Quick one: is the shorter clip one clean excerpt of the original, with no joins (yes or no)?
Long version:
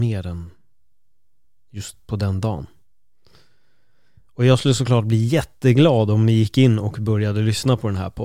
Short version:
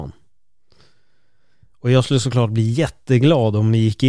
yes